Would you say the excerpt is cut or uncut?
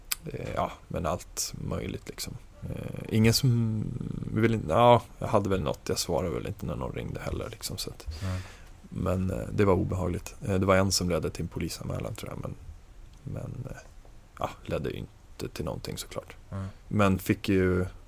cut